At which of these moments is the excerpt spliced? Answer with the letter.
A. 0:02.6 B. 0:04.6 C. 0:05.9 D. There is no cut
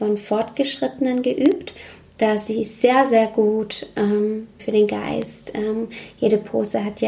B